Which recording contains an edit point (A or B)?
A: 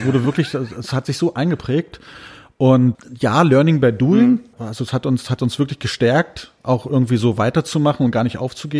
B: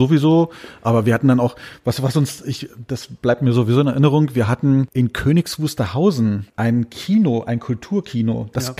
A